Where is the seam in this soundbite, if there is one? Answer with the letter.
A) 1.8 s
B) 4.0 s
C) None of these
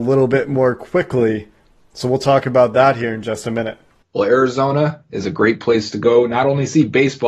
B